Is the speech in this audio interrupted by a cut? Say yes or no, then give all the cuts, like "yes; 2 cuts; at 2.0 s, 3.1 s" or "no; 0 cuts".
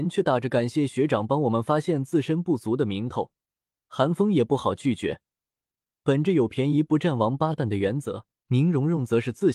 yes; 1 cut; at 8.4 s